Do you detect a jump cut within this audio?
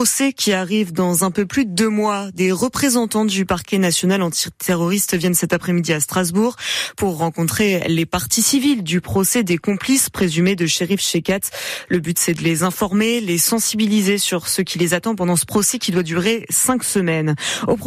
no; 0 cuts

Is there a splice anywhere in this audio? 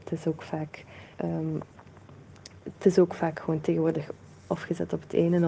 yes; 1 cut; at 1.1 s

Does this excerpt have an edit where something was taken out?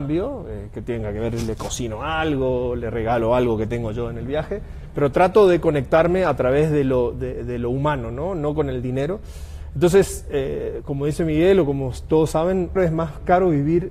yes; 1 cut; at 12.8 s

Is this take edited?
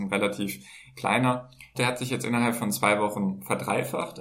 yes; 1 cut; at 1.7 s

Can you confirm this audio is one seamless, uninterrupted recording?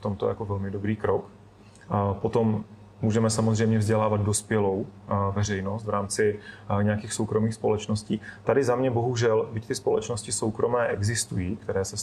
yes; 0 cuts

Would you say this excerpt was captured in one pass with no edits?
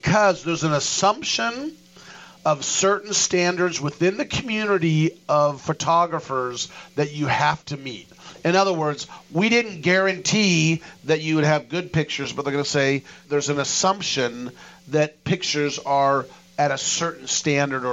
no; 1 cut; at 13.2 s

